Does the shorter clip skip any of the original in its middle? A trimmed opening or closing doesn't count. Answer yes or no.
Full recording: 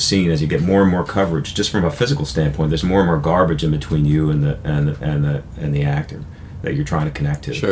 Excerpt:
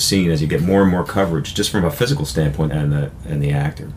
yes